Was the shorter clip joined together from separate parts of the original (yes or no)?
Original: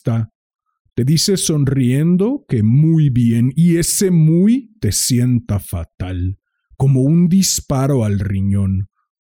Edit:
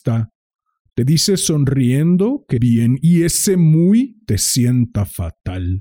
yes